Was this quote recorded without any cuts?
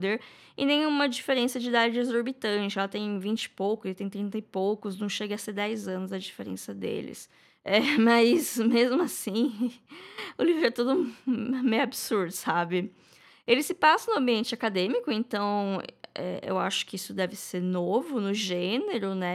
yes; 0 cuts

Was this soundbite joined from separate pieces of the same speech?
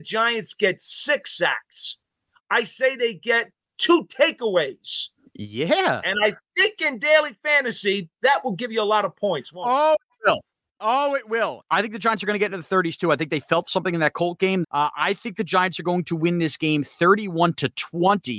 yes; 2 cuts; at 11.6 s, 14.6 s

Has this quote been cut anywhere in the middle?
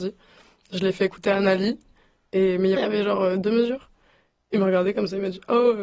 yes; 1 cut; at 2.8 s

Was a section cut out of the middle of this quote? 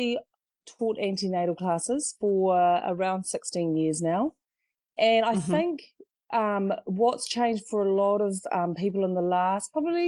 no; 0 cuts

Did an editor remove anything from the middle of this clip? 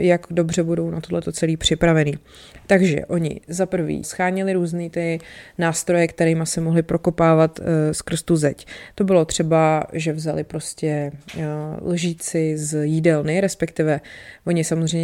yes; 1 cut; at 4.0 s

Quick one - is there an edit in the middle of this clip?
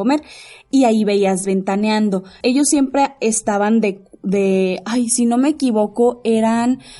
yes; 1 cut; at 2.4 s

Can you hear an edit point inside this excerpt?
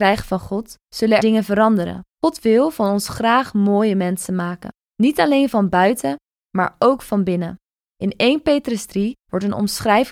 yes; 1 cut; at 1.2 s

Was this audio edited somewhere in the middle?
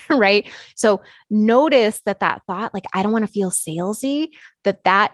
no; 0 cuts

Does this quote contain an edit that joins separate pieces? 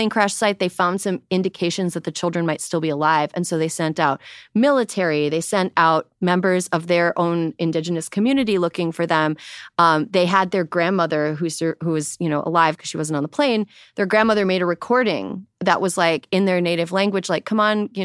no; 0 cuts

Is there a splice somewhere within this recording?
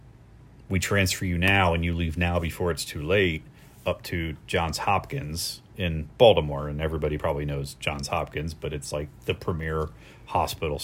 no; 0 cuts

